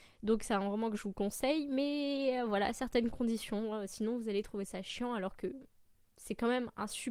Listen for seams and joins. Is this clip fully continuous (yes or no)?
yes